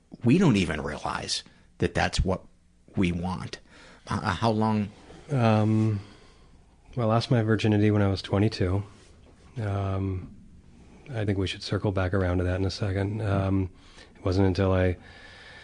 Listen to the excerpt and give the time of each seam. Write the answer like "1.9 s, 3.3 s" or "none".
4.0 s, 11.3 s